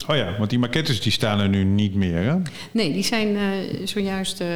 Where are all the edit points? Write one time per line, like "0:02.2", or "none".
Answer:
none

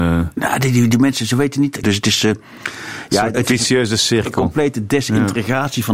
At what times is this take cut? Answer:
0:01.8
0:03.3

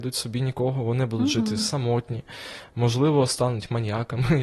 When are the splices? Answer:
none

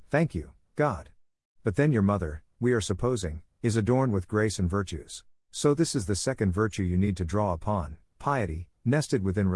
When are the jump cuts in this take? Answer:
0:05.4

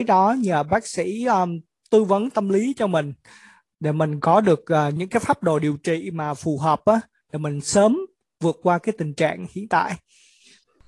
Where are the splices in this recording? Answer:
0:05.0

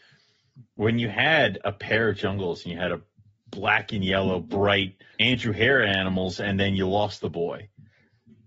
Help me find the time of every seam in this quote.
0:05.1

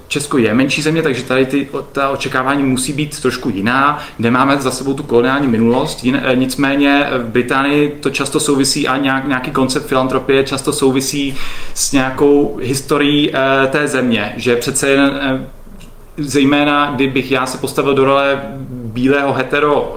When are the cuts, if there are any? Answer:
none

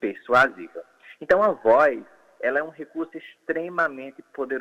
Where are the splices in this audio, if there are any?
0:01.2

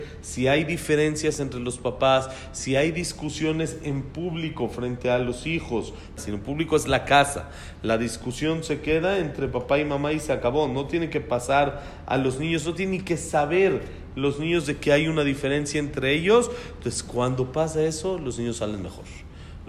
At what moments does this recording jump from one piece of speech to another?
0:06.2

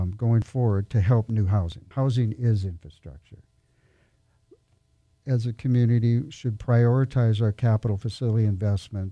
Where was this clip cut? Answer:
0:01.9
0:05.2

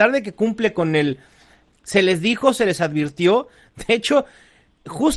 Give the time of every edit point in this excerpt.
0:01.7

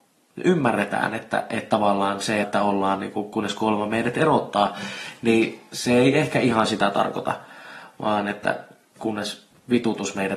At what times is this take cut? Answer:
0:02.4

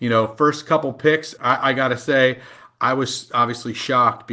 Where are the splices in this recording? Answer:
0:01.4

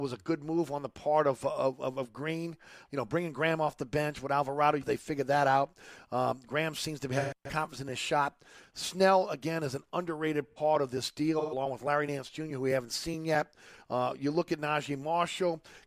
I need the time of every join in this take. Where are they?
0:02.9
0:04.8

